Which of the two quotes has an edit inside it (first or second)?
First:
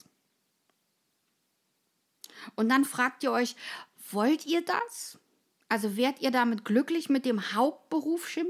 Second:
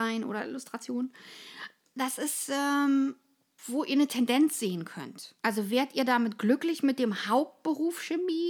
second